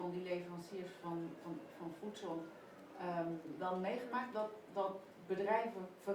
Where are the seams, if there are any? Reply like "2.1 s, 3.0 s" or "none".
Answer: none